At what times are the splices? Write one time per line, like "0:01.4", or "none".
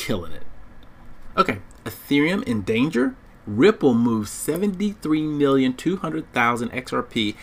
0:01.8
0:03.4